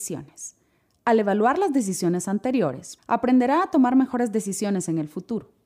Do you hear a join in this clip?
yes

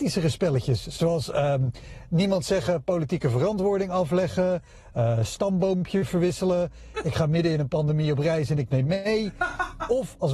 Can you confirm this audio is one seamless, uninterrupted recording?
yes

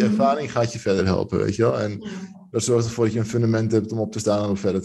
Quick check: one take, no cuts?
yes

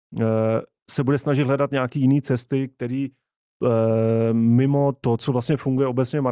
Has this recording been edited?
no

